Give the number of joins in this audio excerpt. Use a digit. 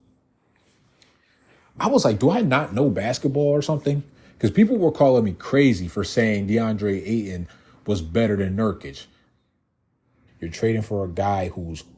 1